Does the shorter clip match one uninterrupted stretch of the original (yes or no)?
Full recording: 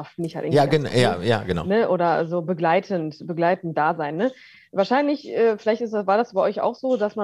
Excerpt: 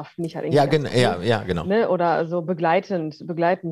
yes